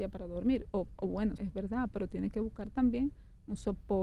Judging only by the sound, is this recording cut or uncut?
cut